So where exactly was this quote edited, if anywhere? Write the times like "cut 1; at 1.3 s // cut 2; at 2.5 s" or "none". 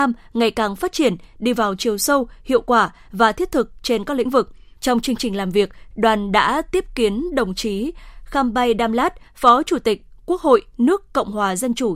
cut 1; at 4.8 s // cut 2; at 5.9 s // cut 3; at 9.3 s